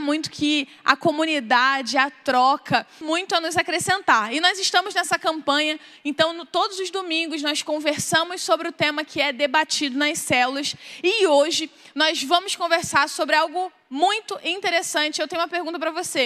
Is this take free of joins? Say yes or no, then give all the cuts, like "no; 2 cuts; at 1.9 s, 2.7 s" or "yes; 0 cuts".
no; 1 cut; at 3.0 s